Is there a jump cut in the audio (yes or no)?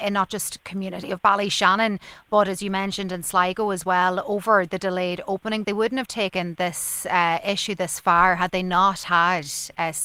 yes